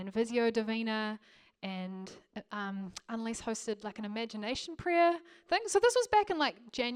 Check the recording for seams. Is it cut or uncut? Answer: uncut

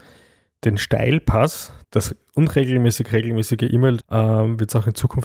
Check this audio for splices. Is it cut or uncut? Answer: cut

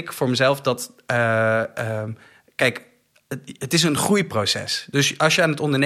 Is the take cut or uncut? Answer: uncut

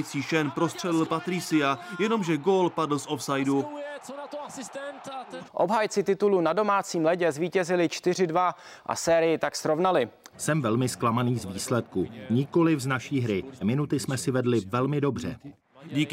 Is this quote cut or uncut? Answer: cut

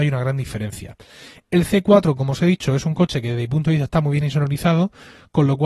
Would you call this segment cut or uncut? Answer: uncut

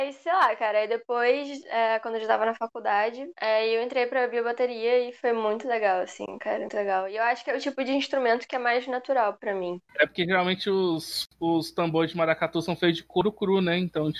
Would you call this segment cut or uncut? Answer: cut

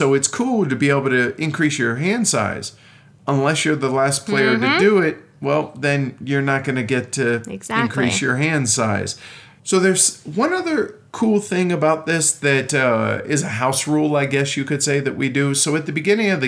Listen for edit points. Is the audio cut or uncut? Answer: uncut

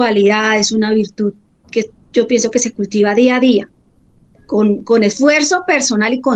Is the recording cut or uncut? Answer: uncut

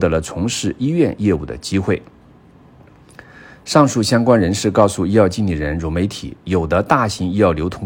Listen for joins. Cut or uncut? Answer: uncut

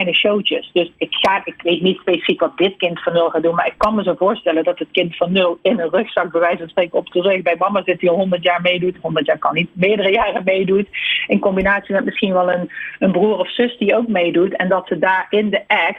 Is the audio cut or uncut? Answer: uncut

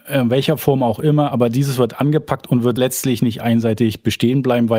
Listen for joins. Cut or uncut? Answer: cut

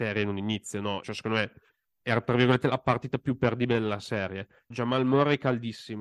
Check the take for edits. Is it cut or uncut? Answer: cut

